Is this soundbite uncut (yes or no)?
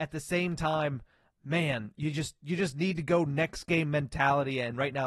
yes